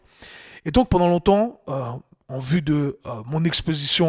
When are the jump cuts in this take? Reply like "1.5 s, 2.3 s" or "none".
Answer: none